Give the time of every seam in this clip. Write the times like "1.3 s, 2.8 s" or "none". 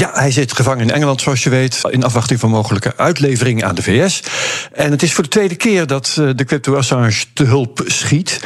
1.8 s